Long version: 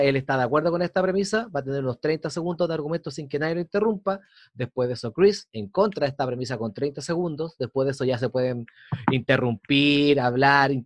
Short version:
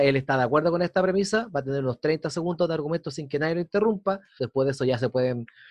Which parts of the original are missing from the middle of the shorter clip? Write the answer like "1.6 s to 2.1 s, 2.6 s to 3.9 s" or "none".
4.4 s to 7.6 s